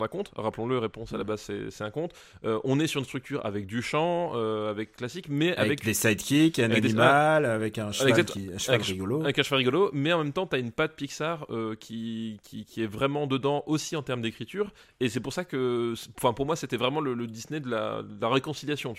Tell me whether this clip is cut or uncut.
uncut